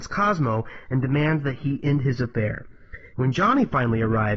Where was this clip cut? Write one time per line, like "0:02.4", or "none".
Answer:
0:03.1

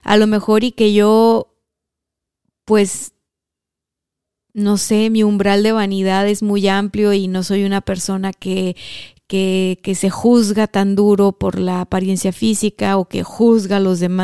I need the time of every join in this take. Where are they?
none

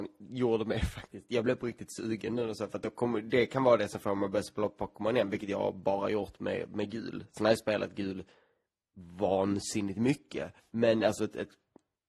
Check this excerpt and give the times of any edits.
0:01.3
0:10.6

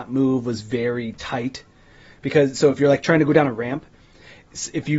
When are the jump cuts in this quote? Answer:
none

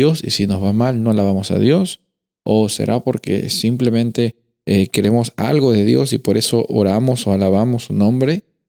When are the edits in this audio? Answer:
none

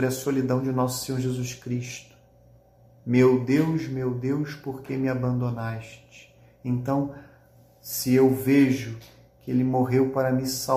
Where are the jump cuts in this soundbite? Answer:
none

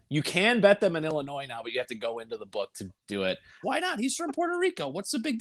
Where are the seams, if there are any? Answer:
0:03.6

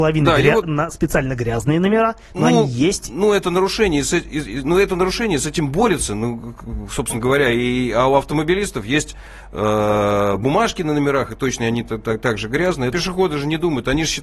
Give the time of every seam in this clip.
0:12.9

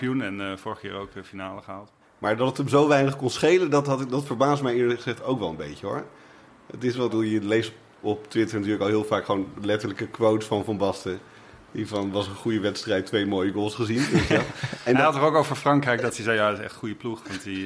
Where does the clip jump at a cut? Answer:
0:02.0
0:07.1

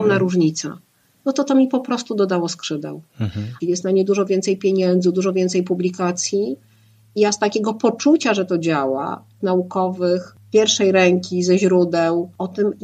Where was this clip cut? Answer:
0:03.6
0:09.4

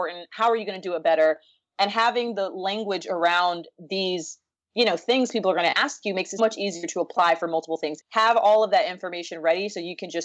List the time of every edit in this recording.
0:06.4
0:08.0

